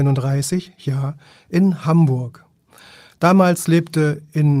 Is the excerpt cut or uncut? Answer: uncut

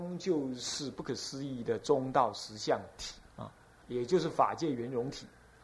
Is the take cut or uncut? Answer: cut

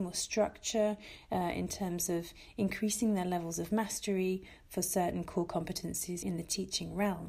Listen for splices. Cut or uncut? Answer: cut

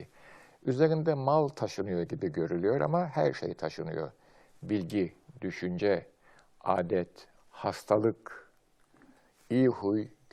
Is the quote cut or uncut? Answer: cut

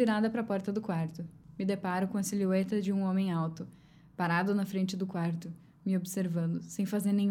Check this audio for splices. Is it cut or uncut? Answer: uncut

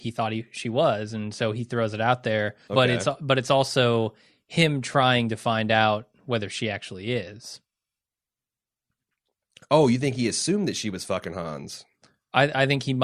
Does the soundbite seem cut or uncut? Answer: cut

